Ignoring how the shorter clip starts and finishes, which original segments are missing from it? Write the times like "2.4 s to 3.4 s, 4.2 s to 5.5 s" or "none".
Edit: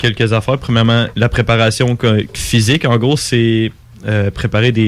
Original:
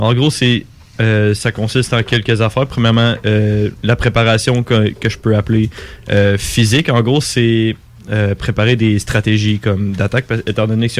3.2 s to 3.8 s, 5.0 s to 6.4 s